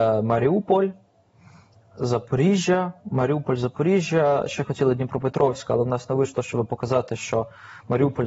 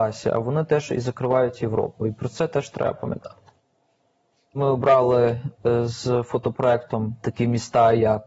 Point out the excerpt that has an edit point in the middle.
second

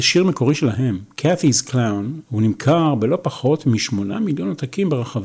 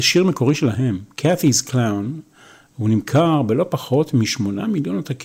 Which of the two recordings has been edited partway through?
first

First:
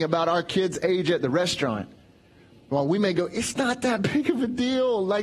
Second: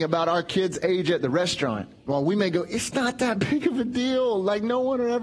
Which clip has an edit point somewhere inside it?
second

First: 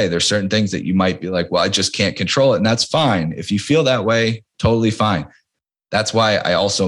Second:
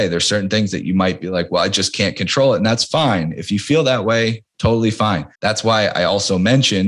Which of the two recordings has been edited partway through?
second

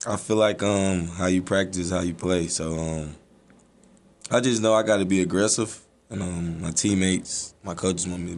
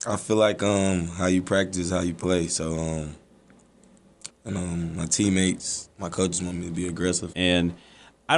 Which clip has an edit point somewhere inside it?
second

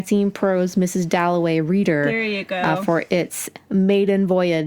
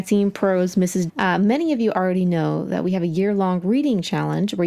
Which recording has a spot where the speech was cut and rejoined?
second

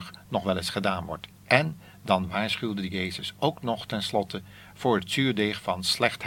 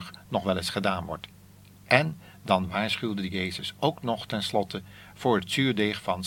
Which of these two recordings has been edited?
first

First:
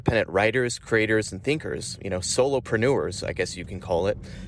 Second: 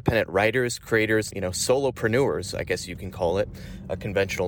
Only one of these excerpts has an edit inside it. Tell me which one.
second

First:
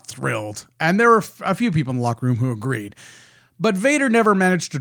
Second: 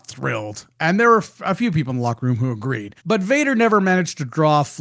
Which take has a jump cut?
second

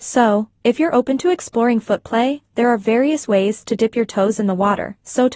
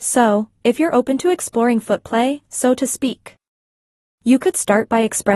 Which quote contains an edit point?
second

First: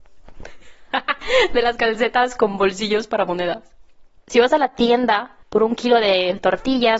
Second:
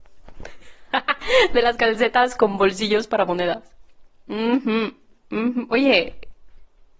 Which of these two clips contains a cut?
first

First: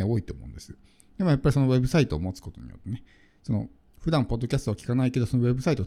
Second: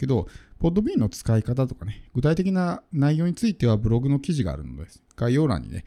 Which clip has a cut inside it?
first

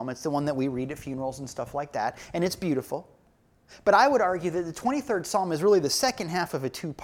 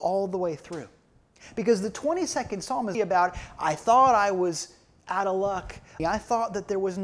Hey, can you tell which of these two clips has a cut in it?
second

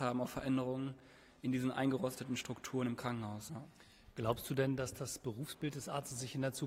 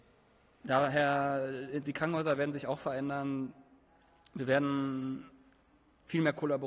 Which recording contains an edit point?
first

